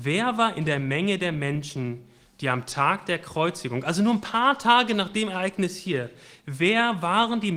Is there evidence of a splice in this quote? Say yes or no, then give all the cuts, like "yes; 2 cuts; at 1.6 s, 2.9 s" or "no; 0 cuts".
no; 0 cuts